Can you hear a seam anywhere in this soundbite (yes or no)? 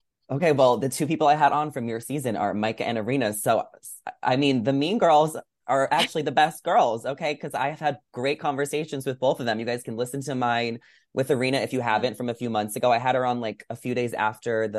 no